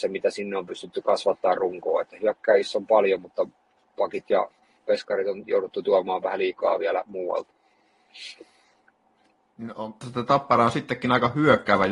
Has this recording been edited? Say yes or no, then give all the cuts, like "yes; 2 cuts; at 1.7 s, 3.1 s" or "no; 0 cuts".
yes; 1 cut; at 10.0 s